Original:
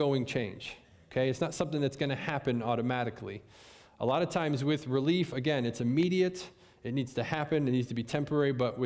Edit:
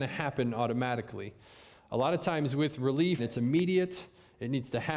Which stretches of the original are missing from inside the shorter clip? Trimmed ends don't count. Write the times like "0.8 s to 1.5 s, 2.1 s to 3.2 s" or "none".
5.3 s to 5.6 s